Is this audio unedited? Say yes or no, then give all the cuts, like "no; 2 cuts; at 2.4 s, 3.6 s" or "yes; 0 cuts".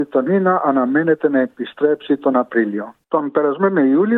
no; 1 cut; at 3.0 s